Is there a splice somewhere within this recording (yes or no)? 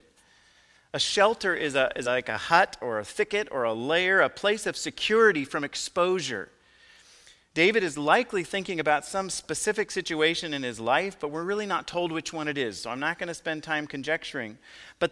no